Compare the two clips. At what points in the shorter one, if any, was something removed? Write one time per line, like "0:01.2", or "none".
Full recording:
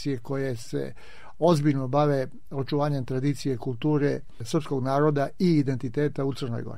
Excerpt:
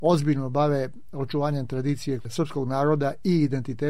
0:02.2